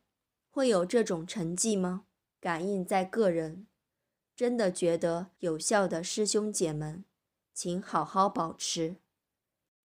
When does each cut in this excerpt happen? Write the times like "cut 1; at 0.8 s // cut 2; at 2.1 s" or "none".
cut 1; at 2.2 s